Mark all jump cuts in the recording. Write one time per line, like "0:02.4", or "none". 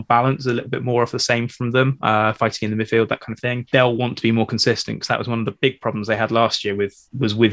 none